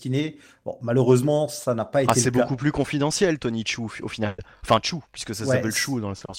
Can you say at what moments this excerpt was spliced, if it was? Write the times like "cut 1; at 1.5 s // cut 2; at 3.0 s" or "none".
none